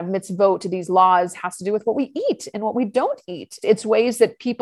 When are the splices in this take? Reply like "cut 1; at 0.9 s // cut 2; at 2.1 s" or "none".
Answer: cut 1; at 3.6 s

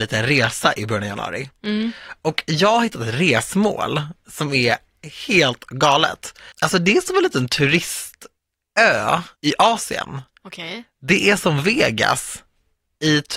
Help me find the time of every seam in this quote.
cut 1; at 9.3 s

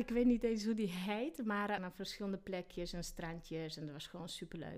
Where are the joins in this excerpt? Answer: cut 1; at 1.8 s

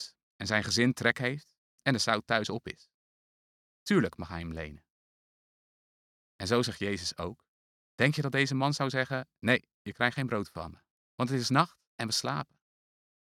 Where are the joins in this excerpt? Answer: none

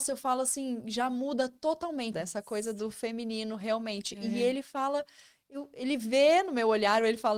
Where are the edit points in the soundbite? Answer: cut 1; at 2.1 s

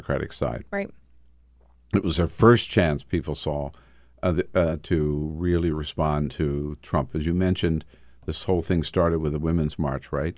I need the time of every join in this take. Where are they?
none

